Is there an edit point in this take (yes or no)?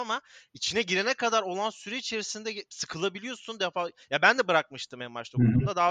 no